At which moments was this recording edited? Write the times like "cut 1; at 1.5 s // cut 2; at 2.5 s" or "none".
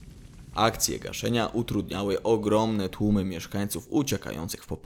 none